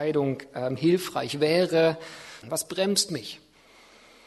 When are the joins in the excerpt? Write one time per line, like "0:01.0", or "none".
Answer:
0:02.4